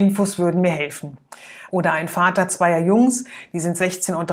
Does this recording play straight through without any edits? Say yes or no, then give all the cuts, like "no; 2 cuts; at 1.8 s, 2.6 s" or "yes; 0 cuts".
no; 1 cut; at 1.7 s